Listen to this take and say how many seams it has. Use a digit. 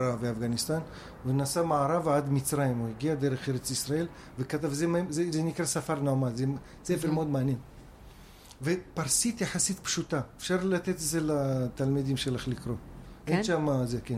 0